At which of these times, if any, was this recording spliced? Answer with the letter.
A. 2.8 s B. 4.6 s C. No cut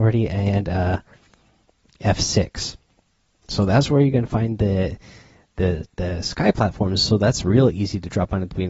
C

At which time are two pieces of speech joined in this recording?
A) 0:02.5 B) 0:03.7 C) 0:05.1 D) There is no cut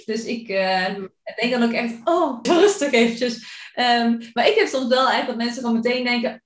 A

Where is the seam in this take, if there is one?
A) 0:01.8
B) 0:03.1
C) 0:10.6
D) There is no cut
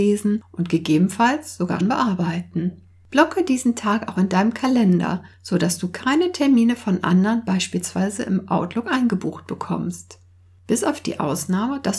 A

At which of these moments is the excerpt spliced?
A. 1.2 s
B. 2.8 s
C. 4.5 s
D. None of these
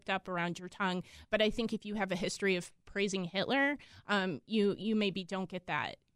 D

